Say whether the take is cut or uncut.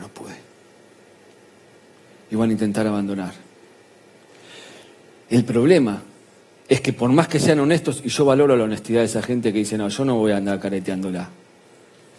uncut